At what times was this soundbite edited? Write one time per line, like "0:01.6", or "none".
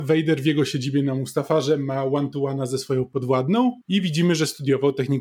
0:03.8